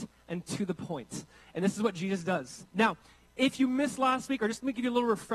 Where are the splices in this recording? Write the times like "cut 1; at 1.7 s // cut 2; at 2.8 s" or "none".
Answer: cut 1; at 2.7 s